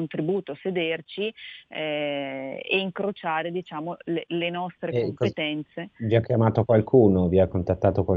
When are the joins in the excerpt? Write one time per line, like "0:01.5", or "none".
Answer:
none